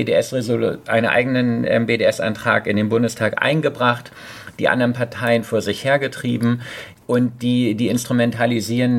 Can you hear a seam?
no; 0 cuts

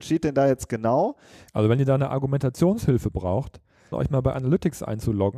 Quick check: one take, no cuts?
no; 2 cuts; at 1.5 s, 3.9 s

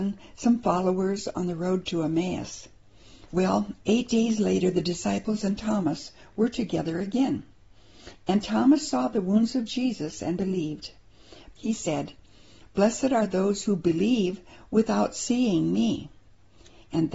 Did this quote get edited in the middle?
yes; 2 cuts; at 3.3 s, 11.5 s

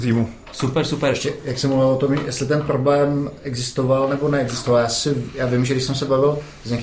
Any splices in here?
no; 0 cuts

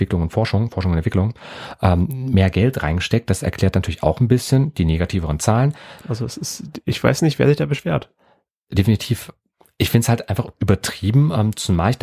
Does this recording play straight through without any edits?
no; 1 cut; at 6.0 s

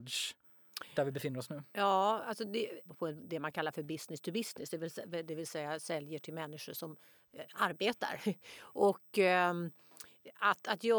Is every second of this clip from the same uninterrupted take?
no; 1 cut; at 2.9 s

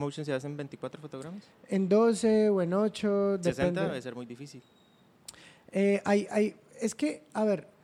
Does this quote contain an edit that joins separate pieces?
no; 0 cuts

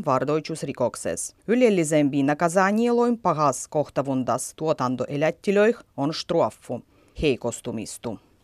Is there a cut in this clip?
yes; 2 cuts; at 1.4 s, 7.1 s

